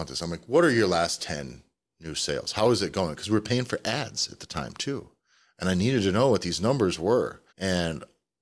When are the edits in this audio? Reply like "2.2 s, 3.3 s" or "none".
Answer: 7.5 s